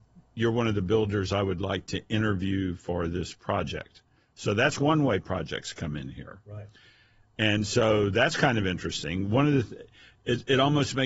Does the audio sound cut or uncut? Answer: uncut